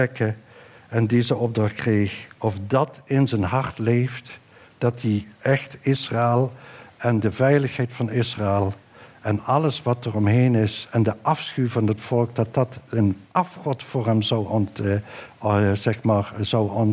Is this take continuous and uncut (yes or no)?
yes